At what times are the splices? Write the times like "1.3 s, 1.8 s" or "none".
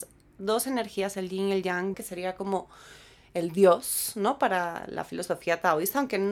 1.9 s